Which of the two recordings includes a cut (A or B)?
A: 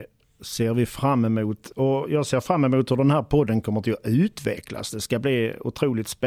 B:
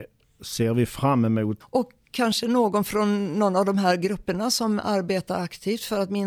B